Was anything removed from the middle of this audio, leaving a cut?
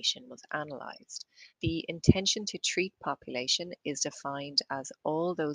yes; 1 cut; at 1.5 s

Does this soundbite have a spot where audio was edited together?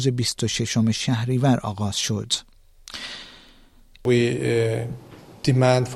yes; 1 cut; at 3.9 s

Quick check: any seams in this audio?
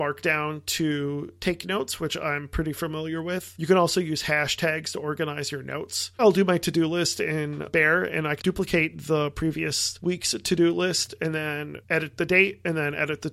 yes; 2 cuts; at 6.2 s, 8.4 s

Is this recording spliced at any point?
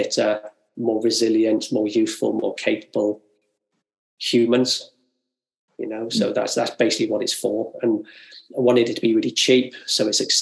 no; 0 cuts

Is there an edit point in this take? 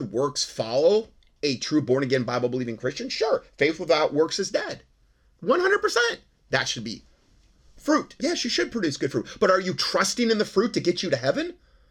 yes; 1 cut; at 8.2 s

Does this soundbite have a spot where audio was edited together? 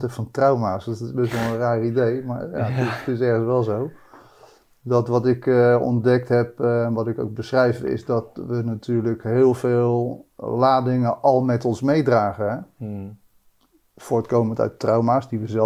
no; 0 cuts

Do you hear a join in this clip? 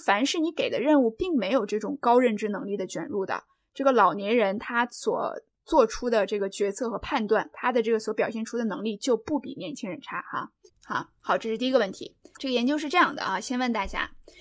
yes; 2 cuts; at 10.7 s, 12.3 s

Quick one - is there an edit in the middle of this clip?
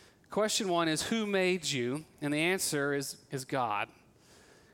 no; 0 cuts

